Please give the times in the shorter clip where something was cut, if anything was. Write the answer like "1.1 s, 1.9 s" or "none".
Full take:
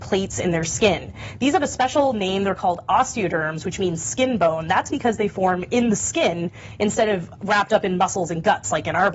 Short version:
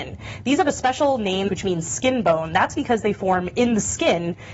1.5 s